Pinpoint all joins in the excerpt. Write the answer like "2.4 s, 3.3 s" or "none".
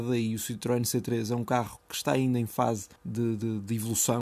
3.0 s